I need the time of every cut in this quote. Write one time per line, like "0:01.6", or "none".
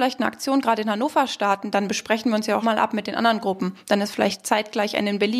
0:02.6